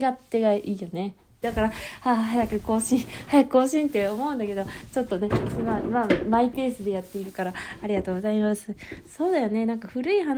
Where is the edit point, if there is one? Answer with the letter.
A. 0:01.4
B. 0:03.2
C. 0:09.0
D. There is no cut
A